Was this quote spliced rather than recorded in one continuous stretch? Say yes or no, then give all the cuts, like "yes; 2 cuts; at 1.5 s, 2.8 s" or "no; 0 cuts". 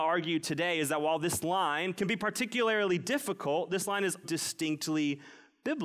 yes; 2 cuts; at 1.9 s, 4.2 s